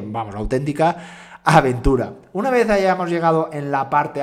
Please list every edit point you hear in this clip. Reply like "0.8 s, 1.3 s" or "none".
none